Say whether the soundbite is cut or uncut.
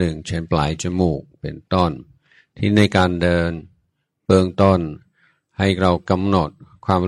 uncut